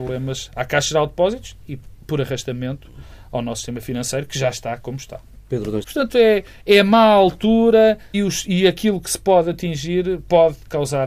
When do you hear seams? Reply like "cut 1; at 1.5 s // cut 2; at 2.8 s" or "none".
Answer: cut 1; at 5.8 s // cut 2; at 8.1 s